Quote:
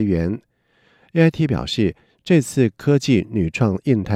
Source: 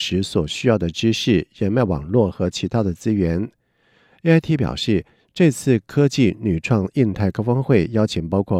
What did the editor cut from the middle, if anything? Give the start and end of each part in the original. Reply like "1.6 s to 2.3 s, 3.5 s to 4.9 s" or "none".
none